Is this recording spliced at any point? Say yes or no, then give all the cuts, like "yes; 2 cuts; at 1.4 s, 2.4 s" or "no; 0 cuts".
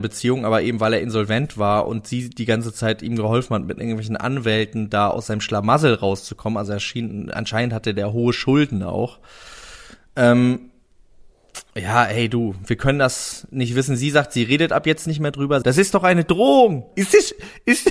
yes; 2 cuts; at 15.6 s, 16.9 s